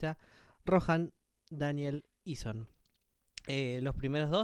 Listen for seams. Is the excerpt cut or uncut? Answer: uncut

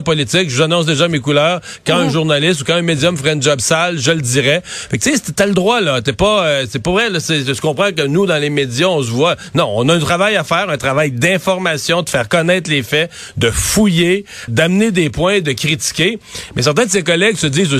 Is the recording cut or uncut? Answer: cut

